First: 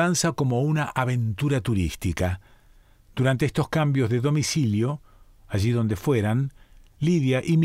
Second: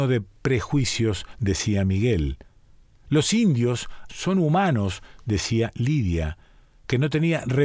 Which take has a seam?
second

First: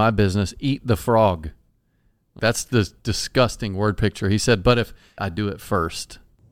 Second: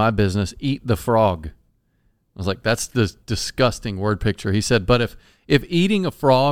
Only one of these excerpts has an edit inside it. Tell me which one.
first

